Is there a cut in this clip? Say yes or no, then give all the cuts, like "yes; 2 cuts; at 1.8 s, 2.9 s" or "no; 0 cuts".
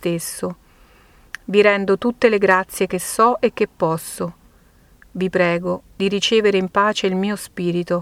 no; 0 cuts